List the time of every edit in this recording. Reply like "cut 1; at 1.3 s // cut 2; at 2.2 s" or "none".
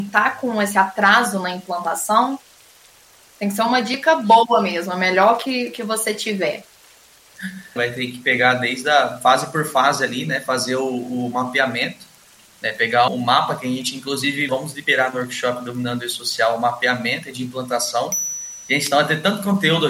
cut 1; at 7.8 s // cut 2; at 13.1 s // cut 3; at 14.5 s